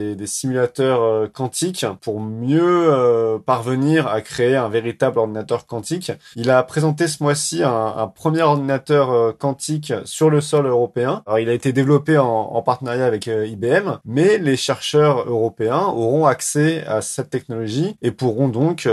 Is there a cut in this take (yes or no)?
yes